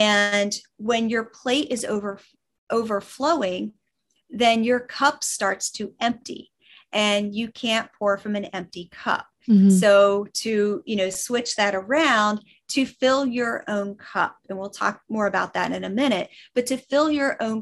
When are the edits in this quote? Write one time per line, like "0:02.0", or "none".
0:09.4